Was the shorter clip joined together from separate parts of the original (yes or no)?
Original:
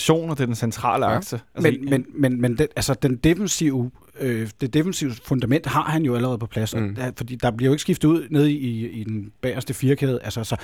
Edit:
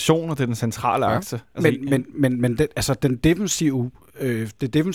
no